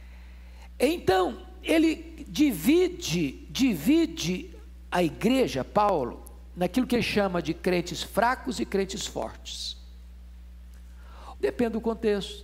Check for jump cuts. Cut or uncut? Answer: cut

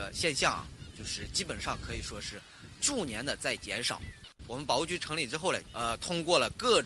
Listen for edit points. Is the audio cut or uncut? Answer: cut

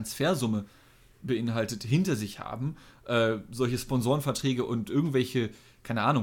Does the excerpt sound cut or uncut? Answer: uncut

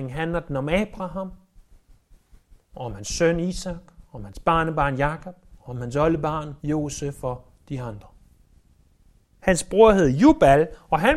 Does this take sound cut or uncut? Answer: cut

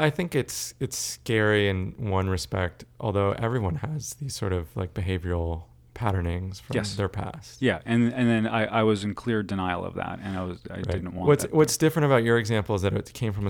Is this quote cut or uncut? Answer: uncut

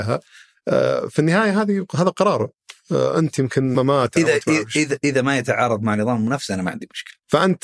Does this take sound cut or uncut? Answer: cut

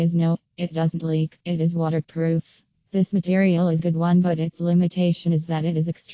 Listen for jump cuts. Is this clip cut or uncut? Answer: cut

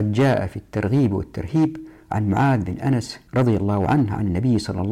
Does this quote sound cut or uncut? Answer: cut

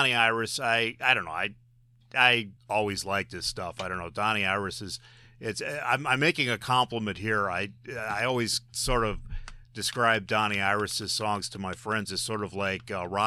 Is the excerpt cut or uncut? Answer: cut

